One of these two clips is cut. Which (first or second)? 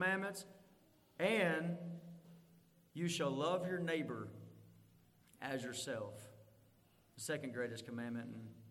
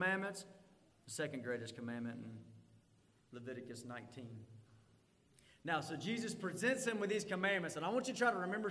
second